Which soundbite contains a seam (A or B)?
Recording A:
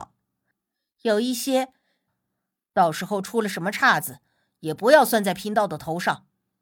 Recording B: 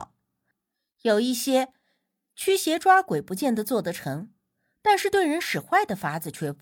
A